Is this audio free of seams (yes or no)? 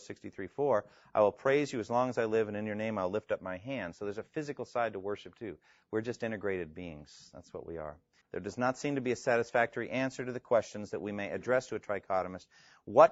no